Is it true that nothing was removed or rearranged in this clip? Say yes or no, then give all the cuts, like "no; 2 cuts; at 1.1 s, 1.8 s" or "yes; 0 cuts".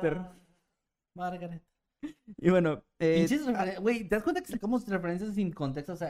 yes; 0 cuts